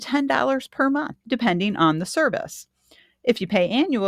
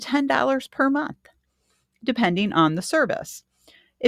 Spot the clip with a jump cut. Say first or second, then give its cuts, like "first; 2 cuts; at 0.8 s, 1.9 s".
first; 1 cut; at 1.2 s